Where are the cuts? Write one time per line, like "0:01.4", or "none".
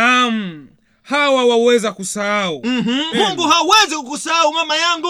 0:03.1